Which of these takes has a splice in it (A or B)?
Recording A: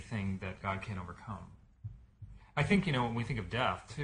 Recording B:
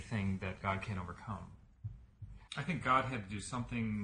B